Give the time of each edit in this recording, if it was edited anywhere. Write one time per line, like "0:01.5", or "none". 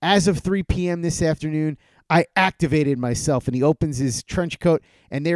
none